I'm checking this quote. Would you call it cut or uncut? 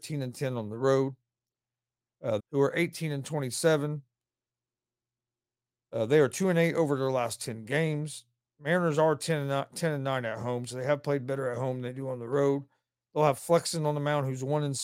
cut